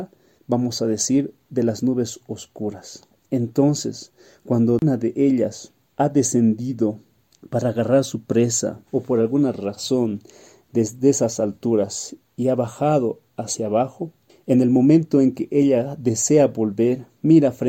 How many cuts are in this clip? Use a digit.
1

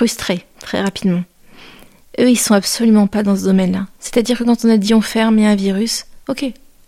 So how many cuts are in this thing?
0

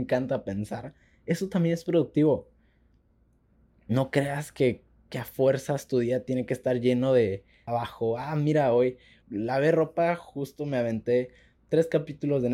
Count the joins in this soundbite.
2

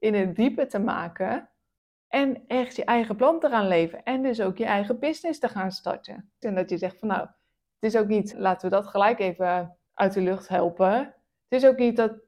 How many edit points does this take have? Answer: 3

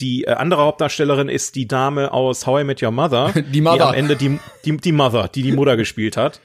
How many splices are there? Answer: 0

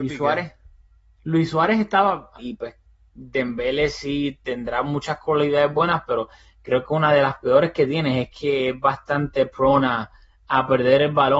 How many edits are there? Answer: 1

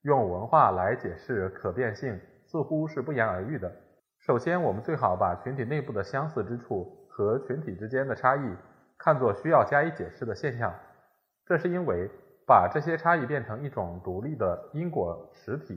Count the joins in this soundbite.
1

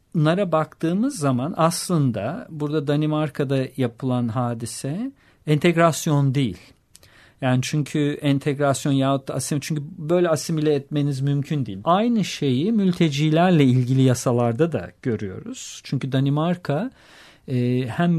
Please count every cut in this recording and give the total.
1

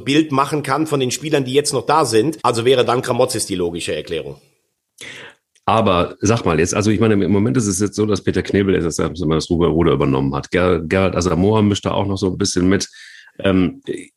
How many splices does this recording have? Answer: 1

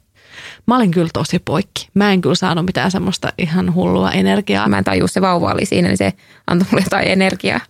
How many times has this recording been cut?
1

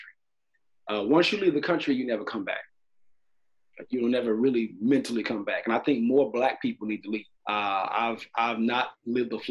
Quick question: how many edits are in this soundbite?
1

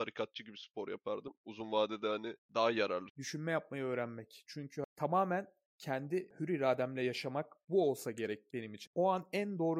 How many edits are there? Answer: 3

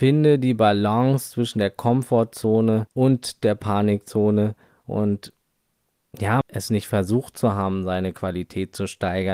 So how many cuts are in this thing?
3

